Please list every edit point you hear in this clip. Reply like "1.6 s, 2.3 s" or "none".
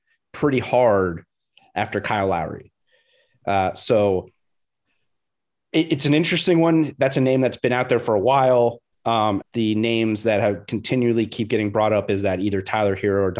9.4 s